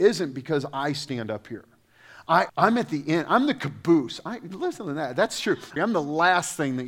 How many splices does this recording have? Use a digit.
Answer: 2